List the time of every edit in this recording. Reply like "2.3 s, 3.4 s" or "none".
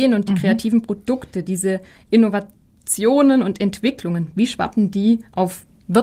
none